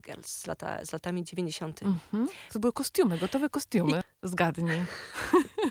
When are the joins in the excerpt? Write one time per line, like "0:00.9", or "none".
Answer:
0:02.5
0:04.0